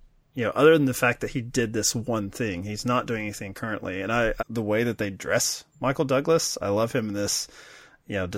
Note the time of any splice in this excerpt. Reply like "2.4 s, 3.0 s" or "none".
4.4 s